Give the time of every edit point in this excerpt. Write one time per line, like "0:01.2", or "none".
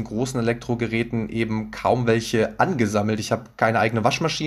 none